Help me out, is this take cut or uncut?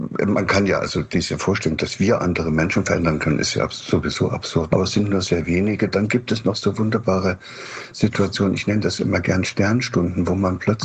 cut